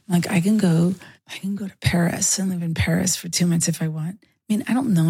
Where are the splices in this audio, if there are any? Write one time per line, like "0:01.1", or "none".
none